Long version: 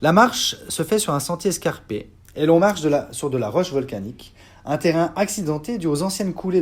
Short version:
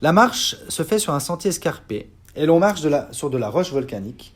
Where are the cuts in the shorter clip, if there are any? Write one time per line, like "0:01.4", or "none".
none